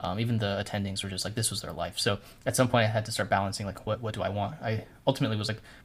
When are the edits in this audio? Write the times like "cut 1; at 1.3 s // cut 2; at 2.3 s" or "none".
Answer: none